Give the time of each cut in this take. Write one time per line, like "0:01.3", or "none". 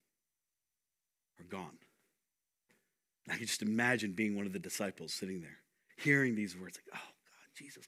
none